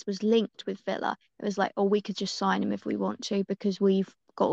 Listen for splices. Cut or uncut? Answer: uncut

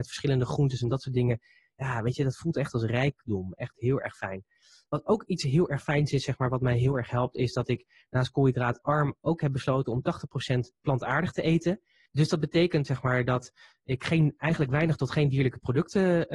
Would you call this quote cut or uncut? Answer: uncut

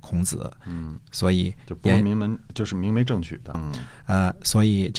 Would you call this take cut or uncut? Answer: cut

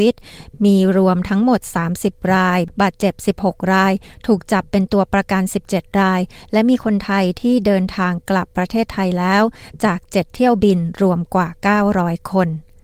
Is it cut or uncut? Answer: uncut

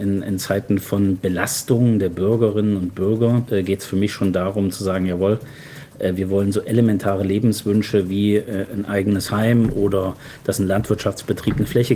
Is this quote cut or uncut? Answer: uncut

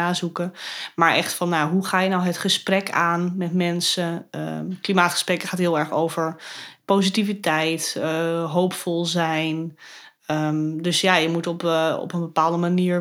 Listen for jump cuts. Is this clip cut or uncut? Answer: uncut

